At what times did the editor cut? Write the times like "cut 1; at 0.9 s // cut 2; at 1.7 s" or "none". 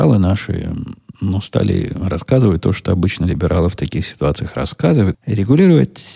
cut 1; at 5.1 s